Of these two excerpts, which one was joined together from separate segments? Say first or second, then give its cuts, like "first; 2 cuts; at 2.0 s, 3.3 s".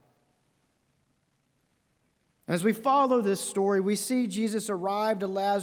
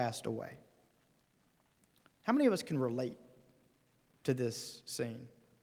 second; 1 cut; at 2.1 s